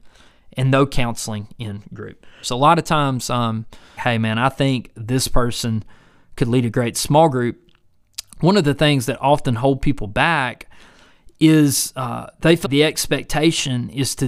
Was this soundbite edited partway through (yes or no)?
yes